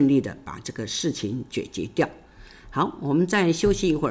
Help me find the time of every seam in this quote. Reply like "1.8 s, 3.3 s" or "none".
none